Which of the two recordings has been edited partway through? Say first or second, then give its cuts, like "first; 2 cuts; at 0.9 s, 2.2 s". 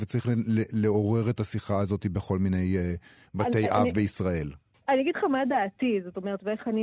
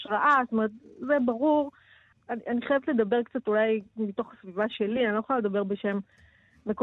second; 1 cut; at 2.1 s